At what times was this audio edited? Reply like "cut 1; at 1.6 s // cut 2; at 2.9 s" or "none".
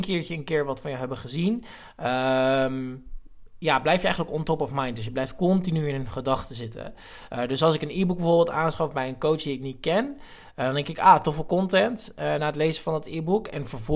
none